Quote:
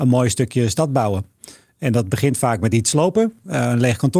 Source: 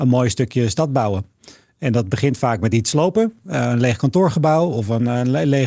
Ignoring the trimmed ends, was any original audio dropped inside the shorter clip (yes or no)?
no